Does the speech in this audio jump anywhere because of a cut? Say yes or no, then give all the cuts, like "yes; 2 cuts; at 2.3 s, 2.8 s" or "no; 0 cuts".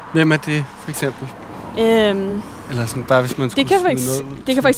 no; 0 cuts